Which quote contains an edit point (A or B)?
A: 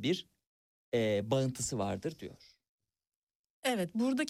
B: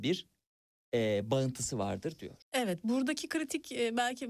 B